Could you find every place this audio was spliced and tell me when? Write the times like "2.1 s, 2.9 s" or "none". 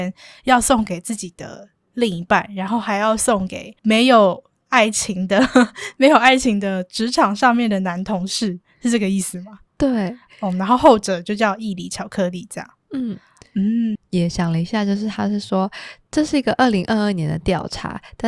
3.8 s, 13.9 s